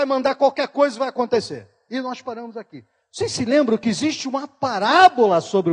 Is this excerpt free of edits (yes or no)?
yes